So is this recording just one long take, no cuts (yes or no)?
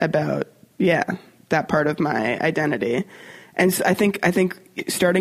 yes